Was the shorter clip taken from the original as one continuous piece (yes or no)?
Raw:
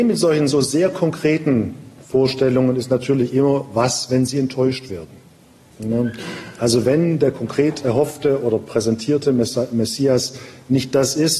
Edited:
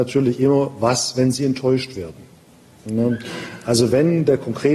yes